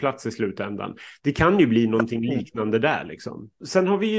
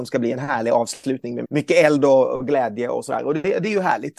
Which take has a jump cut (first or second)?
second